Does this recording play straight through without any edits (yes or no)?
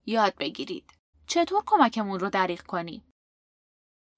no